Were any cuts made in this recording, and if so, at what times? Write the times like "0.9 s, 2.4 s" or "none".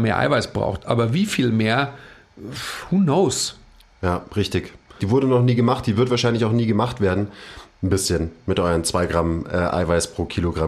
5.0 s, 7.7 s